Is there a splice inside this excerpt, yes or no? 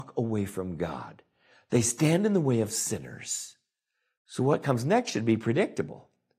no